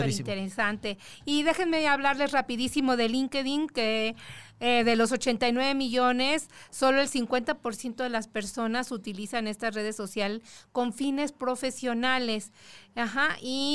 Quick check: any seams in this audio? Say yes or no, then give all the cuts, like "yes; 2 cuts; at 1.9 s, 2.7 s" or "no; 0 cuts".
no; 0 cuts